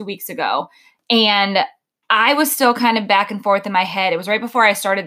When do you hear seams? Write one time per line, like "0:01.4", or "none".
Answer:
none